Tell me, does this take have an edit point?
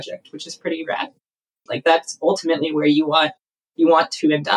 yes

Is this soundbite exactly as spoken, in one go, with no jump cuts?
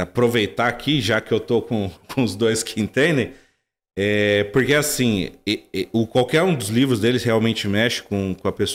yes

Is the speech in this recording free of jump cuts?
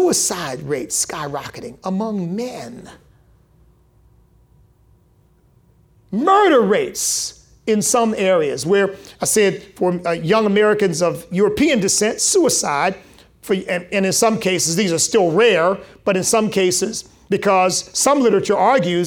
no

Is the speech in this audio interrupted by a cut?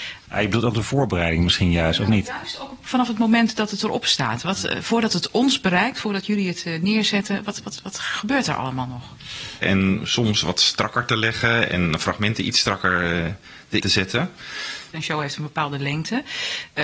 yes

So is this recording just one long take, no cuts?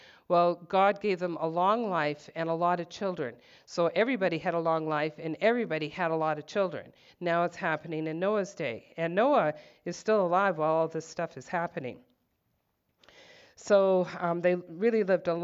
no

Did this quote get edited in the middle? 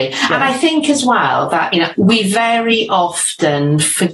yes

